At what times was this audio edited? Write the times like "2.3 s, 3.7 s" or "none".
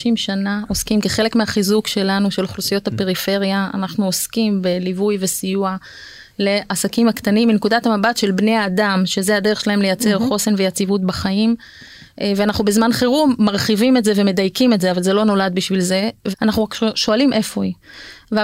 16.3 s